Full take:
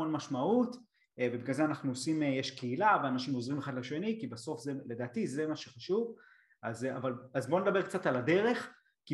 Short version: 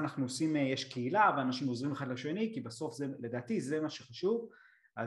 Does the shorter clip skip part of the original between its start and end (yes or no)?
no